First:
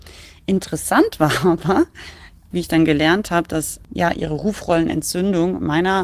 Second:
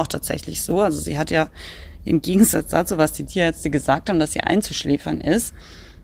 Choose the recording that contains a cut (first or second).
first